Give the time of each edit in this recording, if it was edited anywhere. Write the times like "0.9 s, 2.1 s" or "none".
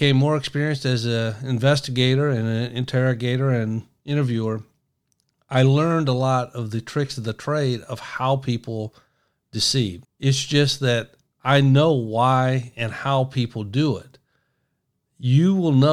10.0 s